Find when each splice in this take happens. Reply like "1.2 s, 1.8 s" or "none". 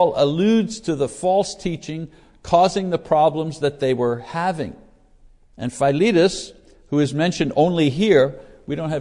5.5 s